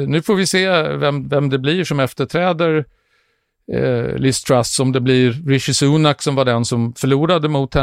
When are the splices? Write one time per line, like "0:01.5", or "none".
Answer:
none